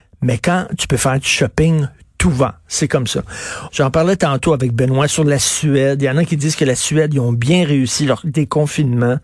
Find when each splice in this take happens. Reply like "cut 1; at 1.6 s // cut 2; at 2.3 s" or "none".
cut 1; at 3.7 s